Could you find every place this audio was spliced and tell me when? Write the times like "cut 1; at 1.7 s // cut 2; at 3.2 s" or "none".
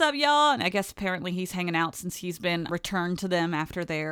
cut 1; at 2.7 s